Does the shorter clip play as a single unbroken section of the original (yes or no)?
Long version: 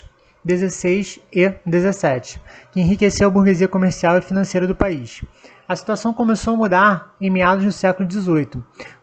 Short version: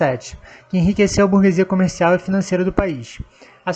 yes